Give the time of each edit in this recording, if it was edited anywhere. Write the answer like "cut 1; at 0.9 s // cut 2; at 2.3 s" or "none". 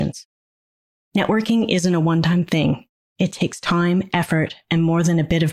cut 1; at 1.0 s